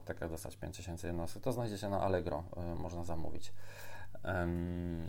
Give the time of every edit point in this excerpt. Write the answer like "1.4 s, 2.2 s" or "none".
2.8 s

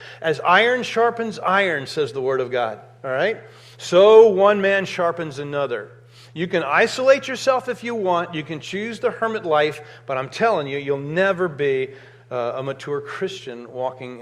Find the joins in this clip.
none

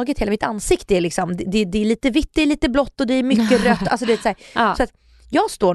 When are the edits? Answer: none

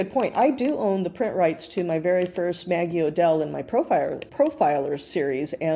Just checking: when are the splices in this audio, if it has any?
4.3 s

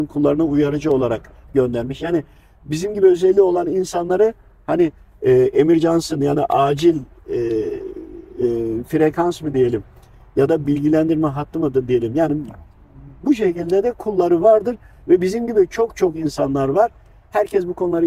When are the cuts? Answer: none

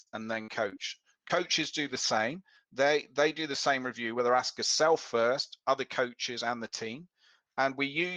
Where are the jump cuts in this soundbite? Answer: none

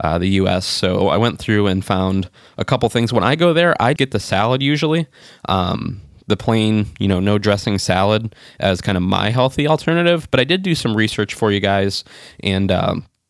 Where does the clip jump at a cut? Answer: 4.0 s

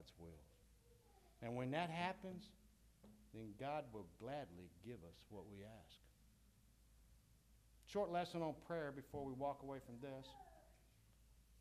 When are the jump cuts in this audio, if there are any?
none

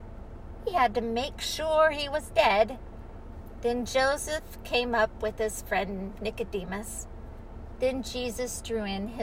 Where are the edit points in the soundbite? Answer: 7.8 s

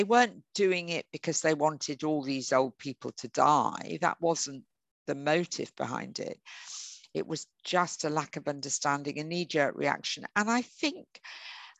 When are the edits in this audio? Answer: none

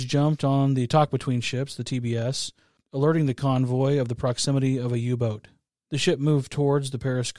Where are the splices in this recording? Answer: none

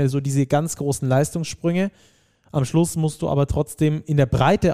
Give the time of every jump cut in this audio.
none

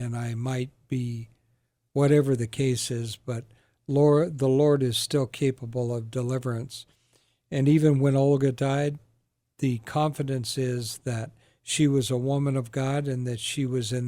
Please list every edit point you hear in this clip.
none

